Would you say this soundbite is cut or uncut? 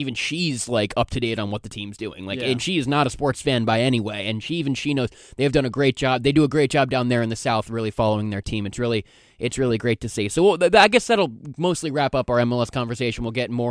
uncut